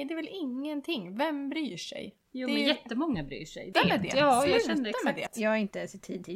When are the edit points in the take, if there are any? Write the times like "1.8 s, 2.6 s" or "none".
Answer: 3.7 s, 5.3 s